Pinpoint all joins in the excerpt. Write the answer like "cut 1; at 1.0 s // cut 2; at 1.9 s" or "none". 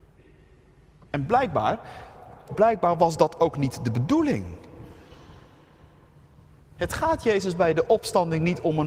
cut 1; at 2.5 s